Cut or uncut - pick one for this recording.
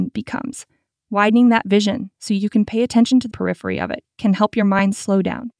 cut